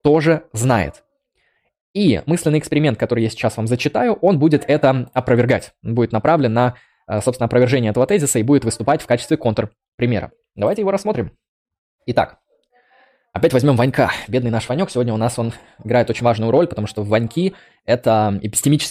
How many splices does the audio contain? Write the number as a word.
zero